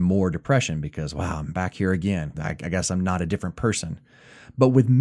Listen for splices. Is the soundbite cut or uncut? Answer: cut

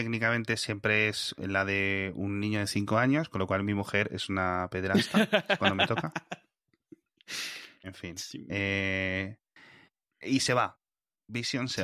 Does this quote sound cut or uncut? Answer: uncut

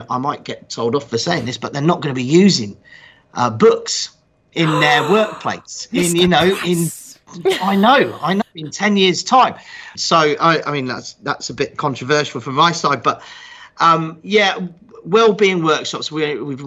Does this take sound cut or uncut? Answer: cut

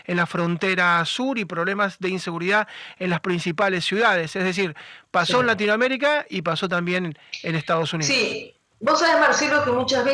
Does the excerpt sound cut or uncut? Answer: uncut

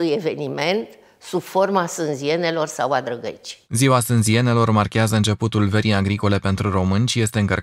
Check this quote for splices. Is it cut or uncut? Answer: uncut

